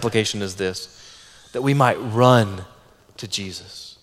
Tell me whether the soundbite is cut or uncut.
uncut